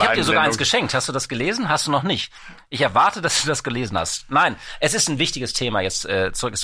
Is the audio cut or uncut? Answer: uncut